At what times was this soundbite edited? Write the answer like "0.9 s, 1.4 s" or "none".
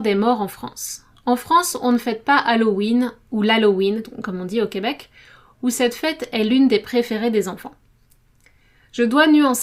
4.0 s